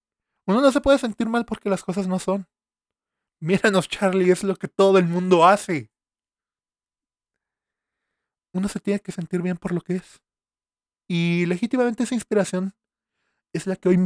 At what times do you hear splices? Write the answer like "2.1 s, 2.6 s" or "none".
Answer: none